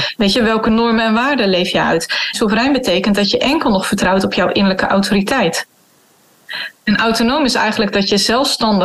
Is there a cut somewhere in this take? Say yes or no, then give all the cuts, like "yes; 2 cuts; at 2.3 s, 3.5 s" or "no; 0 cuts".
yes; 2 cuts; at 2.3 s, 6.8 s